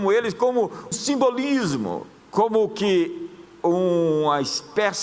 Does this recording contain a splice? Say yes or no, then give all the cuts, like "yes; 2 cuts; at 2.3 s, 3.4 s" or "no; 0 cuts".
yes; 1 cut; at 0.9 s